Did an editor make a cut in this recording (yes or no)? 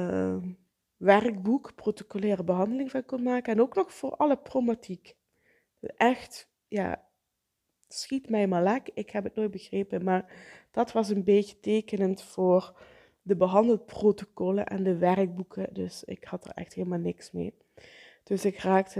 no